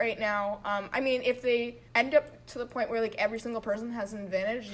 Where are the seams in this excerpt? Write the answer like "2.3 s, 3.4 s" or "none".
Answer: 1.9 s